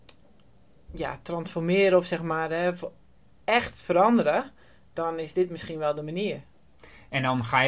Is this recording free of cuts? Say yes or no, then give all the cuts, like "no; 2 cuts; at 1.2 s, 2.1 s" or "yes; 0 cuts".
yes; 0 cuts